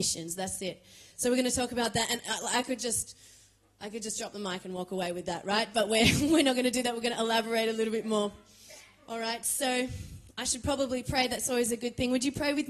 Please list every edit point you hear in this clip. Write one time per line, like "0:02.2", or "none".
none